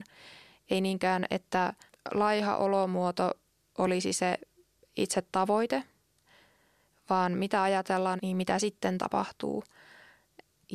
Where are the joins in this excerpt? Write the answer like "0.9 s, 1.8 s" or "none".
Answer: 8.2 s

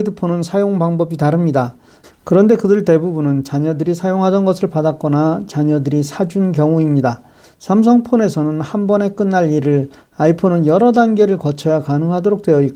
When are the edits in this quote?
2.0 s, 7.4 s

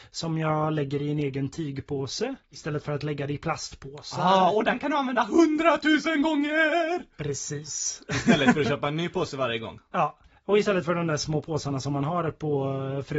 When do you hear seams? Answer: none

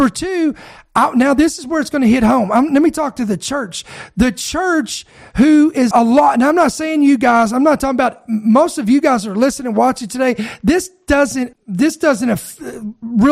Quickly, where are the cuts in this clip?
5.9 s, 11.5 s

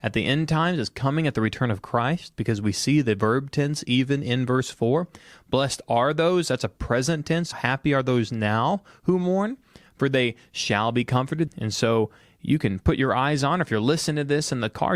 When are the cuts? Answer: 7.5 s, 11.5 s

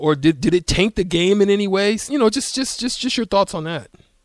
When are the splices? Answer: none

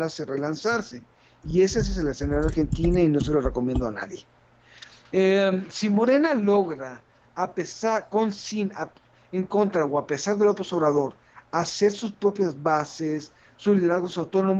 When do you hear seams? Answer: none

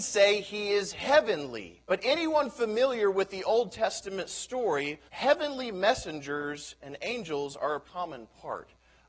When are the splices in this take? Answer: 1.9 s, 5.1 s, 7.8 s

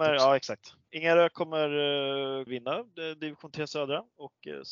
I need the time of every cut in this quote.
2.5 s

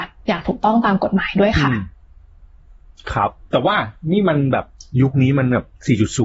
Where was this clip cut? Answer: none

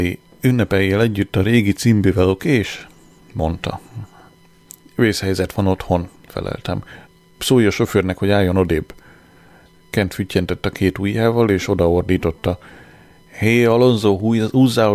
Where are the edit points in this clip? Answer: none

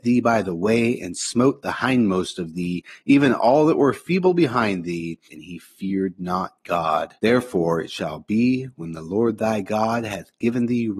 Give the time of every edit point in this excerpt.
5.3 s, 7.2 s

